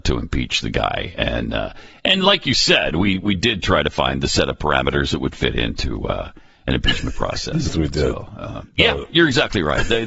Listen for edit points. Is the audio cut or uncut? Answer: uncut